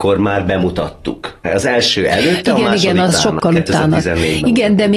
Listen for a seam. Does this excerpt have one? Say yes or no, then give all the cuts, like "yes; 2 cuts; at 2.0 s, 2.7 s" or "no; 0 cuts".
yes; 1 cut; at 1.5 s